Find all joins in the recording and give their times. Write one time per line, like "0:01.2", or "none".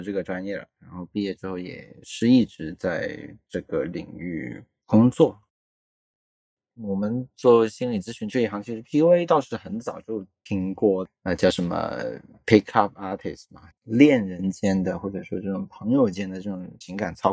0:06.6
0:13.7